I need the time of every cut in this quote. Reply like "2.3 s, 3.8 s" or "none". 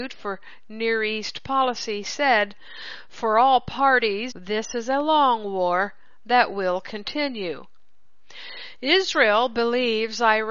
4.3 s